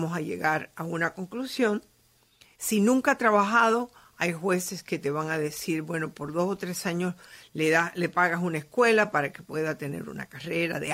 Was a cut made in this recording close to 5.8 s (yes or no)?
no